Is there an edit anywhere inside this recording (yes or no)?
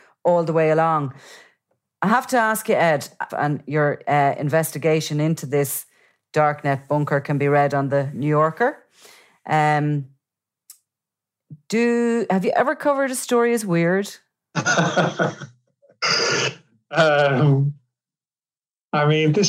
yes